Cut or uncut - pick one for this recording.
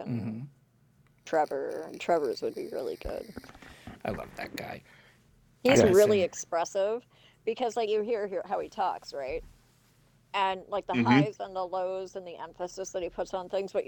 uncut